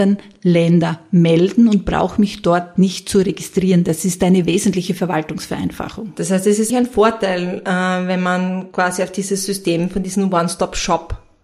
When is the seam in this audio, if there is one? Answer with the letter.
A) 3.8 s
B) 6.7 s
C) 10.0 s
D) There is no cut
B